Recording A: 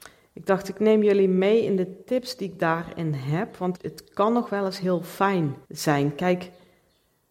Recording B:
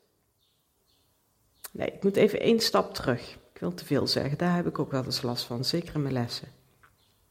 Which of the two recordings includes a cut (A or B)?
A